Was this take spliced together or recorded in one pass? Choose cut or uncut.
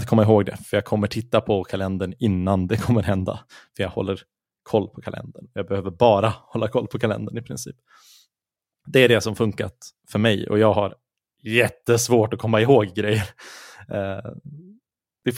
uncut